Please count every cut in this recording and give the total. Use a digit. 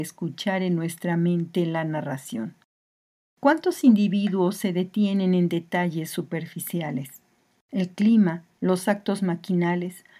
1